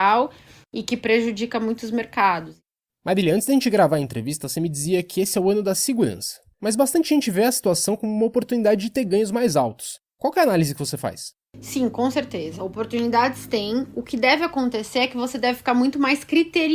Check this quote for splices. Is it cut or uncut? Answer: uncut